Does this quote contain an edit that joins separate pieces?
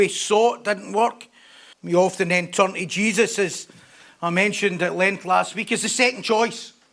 yes; 1 cut; at 1.7 s

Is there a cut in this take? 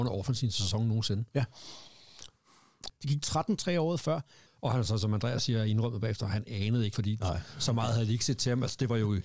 yes; 3 cuts; at 2.9 s, 4.5 s, 6.9 s

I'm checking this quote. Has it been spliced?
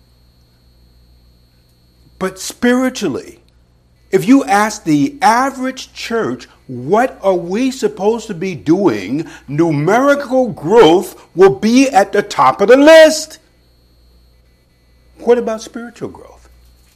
yes; 1 cut; at 4.0 s

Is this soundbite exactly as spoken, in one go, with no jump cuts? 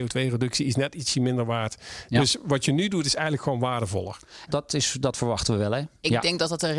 no; 1 cut; at 4.5 s

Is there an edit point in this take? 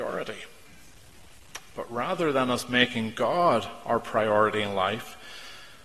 no; 0 cuts

